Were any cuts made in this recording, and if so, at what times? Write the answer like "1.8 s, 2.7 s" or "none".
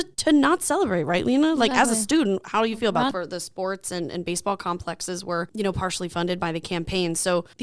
3.1 s